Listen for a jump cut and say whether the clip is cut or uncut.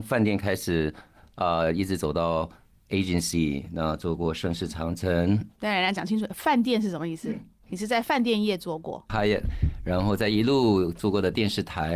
cut